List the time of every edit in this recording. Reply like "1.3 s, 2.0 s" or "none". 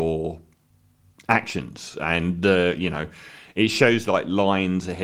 none